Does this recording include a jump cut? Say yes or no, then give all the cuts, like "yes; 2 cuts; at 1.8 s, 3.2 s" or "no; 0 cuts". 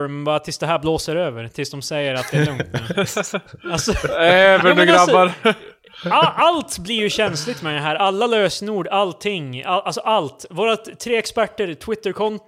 no; 0 cuts